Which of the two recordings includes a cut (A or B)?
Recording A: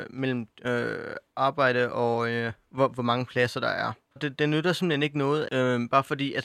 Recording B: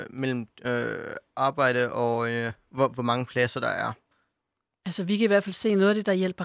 A